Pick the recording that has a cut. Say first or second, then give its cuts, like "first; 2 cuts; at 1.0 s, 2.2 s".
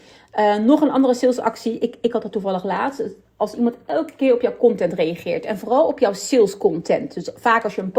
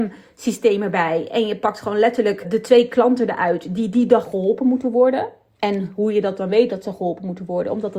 second; 1 cut; at 2.4 s